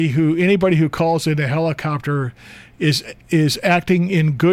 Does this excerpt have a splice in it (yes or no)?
yes